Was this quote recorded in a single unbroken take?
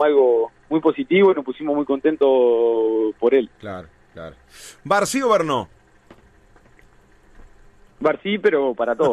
no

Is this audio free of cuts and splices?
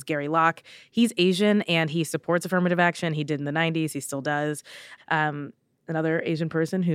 no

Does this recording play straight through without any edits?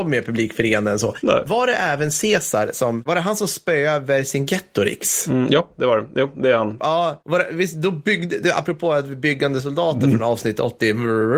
yes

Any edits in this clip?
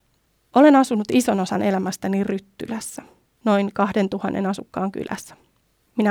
yes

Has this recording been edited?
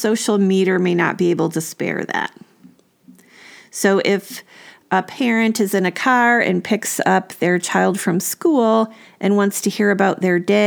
no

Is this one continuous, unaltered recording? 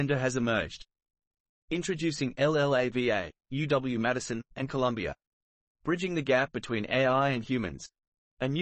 no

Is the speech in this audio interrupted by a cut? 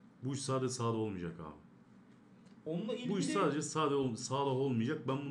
no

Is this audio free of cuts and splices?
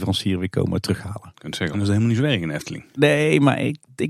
no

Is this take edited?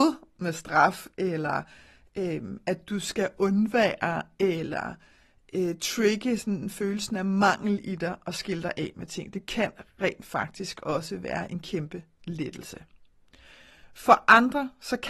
no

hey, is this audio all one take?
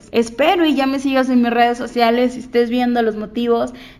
yes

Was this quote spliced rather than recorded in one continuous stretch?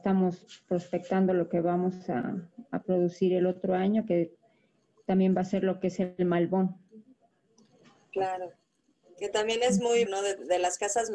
yes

